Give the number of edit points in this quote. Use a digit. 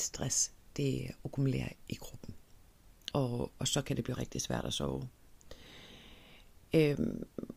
3